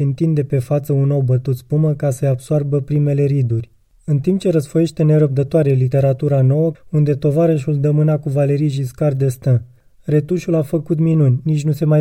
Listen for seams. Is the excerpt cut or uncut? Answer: cut